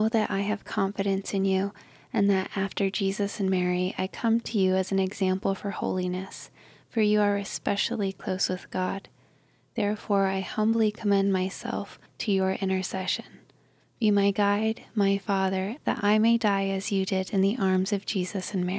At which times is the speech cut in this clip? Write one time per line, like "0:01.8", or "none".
0:12.1
0:13.8
0:15.8